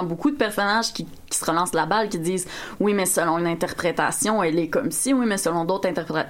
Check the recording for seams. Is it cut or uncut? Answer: uncut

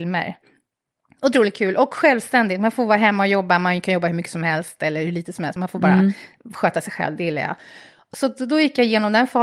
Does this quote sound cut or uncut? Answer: uncut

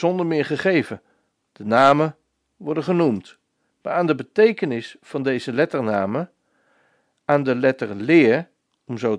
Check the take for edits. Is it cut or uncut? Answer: uncut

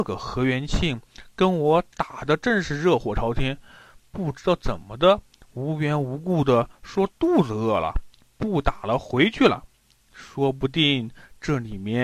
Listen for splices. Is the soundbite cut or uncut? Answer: uncut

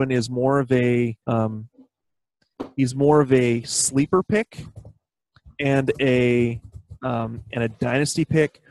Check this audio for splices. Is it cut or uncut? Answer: cut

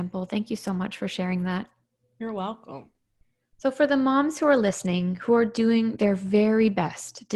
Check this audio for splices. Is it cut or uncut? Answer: uncut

